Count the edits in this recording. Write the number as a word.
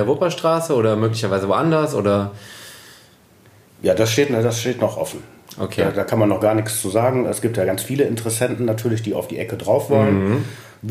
zero